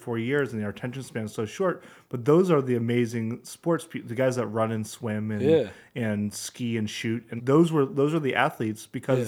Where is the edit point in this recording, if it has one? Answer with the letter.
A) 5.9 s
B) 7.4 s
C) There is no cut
B